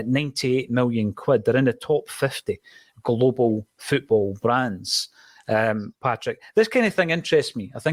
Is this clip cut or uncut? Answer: uncut